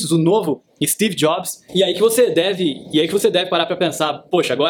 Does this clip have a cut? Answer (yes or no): yes